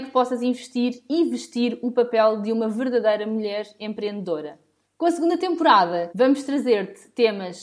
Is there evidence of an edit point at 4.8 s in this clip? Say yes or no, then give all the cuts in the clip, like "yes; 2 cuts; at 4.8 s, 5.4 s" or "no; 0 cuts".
yes; 2 cuts; at 4.8 s, 6.1 s